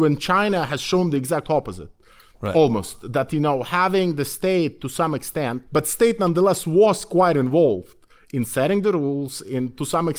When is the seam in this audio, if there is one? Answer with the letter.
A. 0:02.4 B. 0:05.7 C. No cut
B